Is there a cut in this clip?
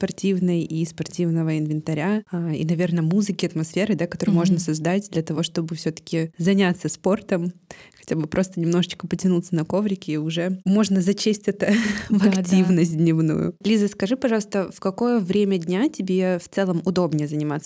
no; 0 cuts

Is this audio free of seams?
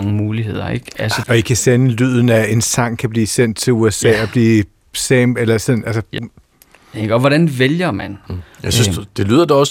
no; 3 cuts; at 1.2 s, 6.2 s, 8.2 s

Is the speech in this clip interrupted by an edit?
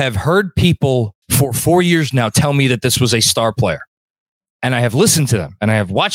yes; 1 cut; at 1.2 s

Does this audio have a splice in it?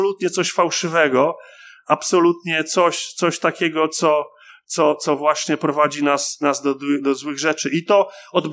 no; 0 cuts

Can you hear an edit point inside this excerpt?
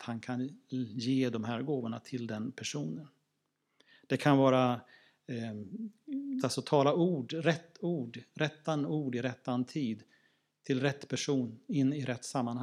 yes; 1 cut; at 6.4 s

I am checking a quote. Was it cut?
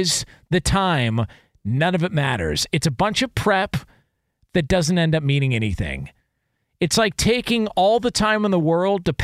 no; 0 cuts

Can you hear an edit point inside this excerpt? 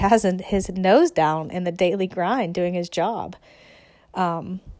no; 0 cuts

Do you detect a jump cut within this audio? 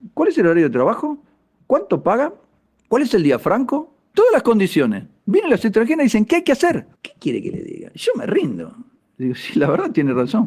yes; 1 cut; at 7.0 s

